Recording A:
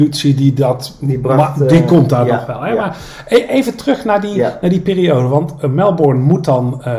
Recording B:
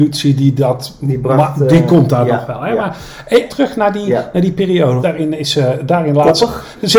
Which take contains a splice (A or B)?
B